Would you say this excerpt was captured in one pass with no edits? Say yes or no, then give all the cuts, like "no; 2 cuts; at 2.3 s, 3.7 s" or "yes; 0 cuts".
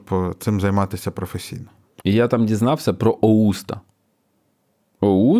no; 1 cut; at 2.0 s